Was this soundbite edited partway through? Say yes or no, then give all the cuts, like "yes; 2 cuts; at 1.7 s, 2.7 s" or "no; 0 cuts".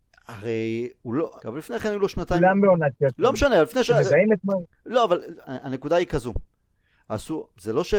yes; 1 cut; at 1.4 s